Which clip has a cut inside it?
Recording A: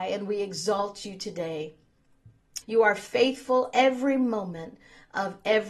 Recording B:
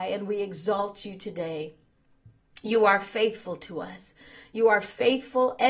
A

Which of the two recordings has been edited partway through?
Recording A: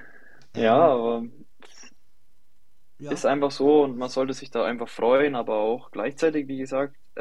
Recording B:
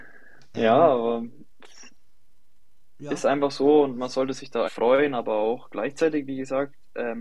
B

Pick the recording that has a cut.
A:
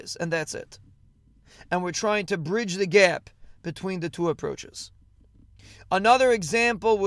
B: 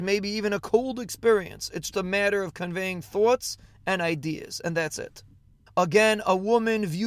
B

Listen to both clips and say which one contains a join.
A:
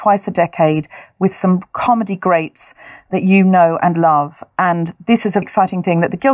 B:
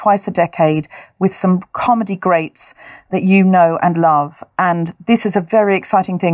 A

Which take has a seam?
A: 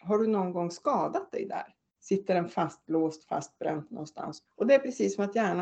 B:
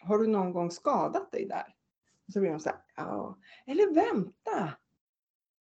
A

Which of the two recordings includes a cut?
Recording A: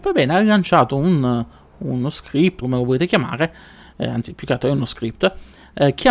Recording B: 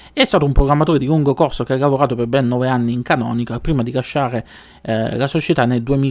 A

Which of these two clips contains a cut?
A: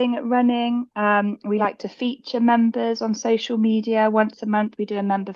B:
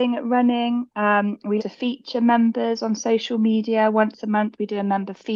B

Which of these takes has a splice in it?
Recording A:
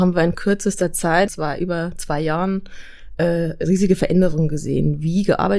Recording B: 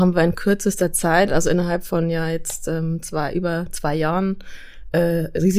A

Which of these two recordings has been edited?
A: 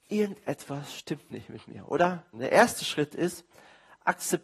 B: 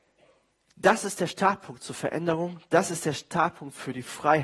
A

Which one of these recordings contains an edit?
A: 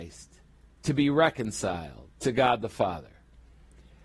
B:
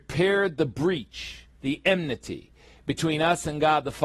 A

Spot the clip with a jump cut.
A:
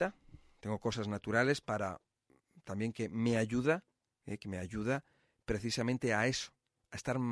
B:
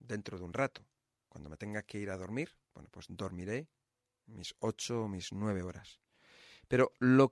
B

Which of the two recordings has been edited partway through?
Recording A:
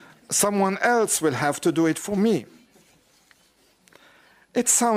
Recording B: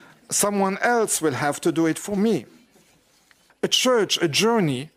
B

